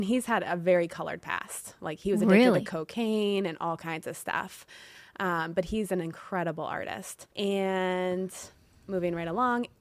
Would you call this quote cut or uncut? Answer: cut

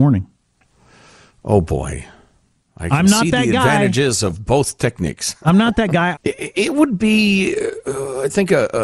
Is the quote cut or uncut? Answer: cut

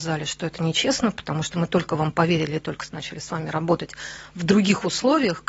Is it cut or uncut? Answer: uncut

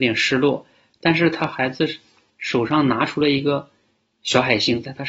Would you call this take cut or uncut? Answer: uncut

